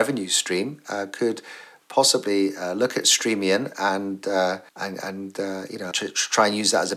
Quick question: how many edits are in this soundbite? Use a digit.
2